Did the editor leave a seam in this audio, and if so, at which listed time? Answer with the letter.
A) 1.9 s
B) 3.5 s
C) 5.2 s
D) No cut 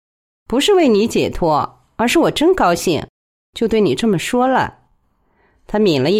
D